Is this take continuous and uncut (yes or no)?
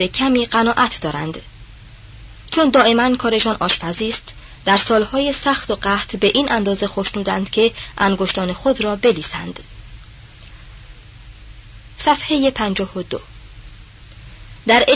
yes